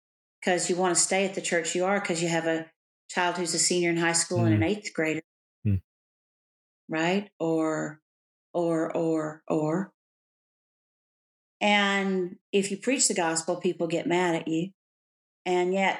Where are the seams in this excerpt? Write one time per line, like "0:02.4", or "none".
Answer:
none